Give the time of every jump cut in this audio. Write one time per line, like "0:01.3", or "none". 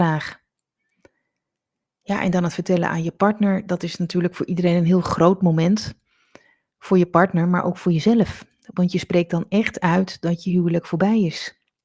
none